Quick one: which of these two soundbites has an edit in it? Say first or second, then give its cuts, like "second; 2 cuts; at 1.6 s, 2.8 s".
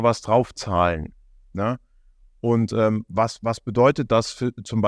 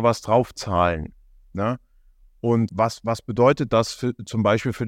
second; 1 cut; at 2.7 s